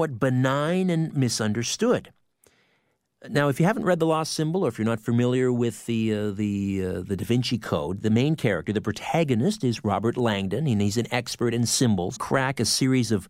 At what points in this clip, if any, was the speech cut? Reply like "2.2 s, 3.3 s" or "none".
8.0 s, 12.2 s